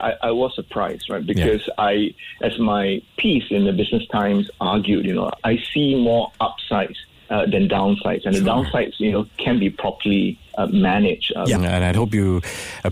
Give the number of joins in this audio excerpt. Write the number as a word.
two